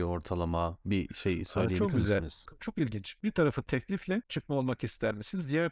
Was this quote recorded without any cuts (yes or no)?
no